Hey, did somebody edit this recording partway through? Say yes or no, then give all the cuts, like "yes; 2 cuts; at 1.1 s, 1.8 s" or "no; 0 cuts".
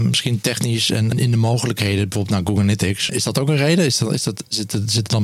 yes; 2 cuts; at 1.1 s, 3.1 s